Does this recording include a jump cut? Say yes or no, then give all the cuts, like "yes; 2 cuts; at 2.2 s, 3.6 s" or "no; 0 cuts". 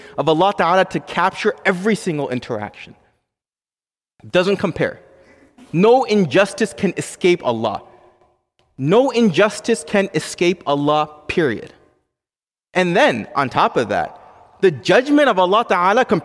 no; 0 cuts